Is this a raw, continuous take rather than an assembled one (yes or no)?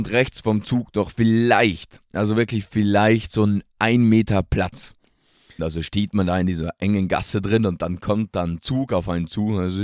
no